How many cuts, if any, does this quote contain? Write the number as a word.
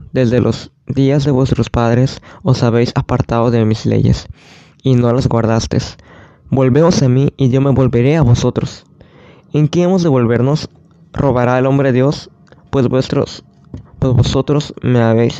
zero